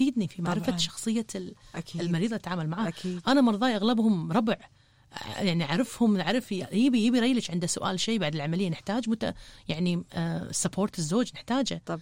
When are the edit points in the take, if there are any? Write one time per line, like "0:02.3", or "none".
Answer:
none

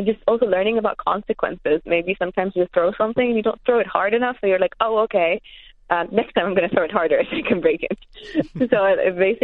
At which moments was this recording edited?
none

